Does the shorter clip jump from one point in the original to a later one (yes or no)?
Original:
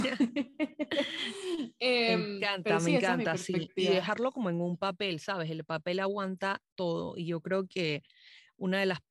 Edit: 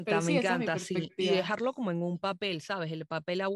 no